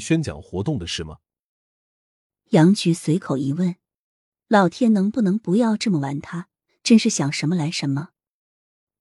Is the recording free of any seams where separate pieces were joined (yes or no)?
no